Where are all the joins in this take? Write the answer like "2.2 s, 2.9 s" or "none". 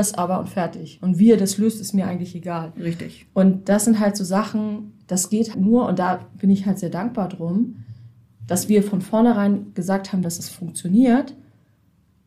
5.5 s, 10.2 s